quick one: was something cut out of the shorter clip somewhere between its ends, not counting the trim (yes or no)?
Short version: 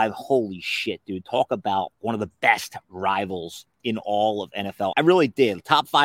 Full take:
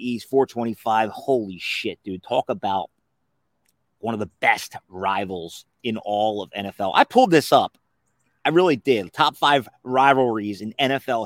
yes